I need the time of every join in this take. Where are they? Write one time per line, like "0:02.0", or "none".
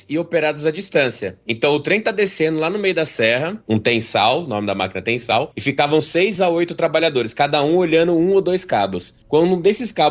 0:03.6